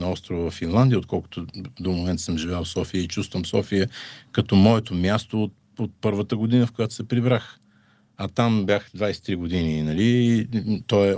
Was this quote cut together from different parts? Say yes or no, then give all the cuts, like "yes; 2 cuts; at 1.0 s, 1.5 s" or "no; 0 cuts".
no; 0 cuts